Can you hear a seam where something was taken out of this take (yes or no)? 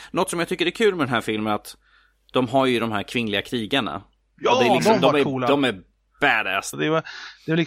yes